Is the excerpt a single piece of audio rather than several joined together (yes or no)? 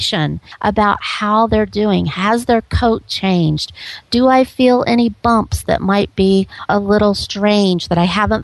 yes